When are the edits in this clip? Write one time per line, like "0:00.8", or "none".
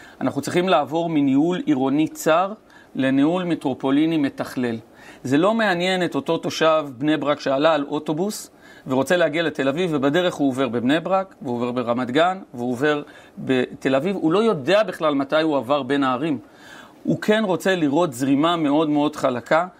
none